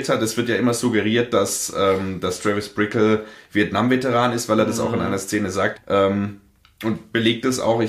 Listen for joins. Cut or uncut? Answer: cut